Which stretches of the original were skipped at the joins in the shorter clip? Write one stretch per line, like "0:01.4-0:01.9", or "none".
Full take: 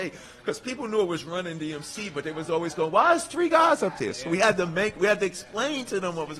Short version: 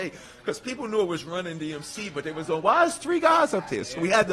0:02.5-0:02.7